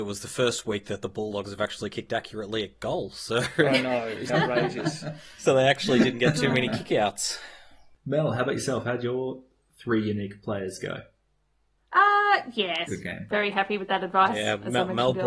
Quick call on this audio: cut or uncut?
cut